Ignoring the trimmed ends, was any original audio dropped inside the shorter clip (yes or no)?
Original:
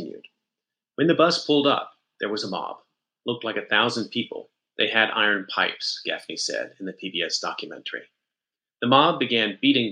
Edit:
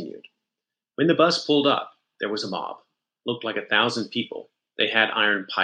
no